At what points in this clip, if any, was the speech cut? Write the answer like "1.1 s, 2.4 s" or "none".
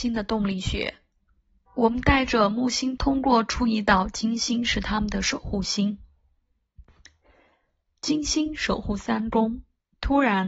1.7 s, 3.0 s